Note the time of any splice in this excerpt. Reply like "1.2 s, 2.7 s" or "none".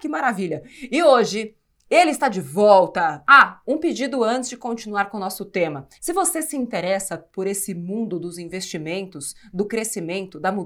5.9 s